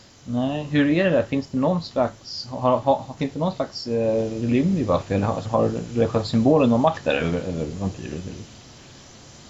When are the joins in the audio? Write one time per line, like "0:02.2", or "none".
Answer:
0:05.4